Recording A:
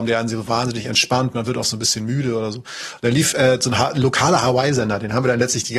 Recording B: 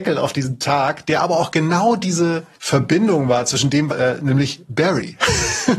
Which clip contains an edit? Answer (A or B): B